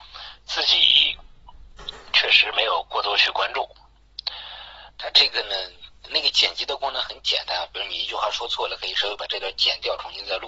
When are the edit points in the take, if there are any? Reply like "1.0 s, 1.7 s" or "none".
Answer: 4.9 s

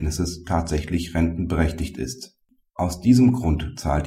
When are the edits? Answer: 2.6 s

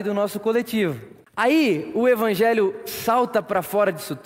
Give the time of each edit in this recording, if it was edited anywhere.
1.3 s

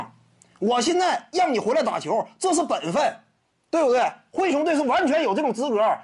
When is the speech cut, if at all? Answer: none

